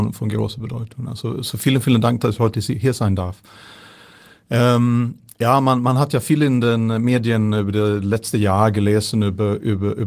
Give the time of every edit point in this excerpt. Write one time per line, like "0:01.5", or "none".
none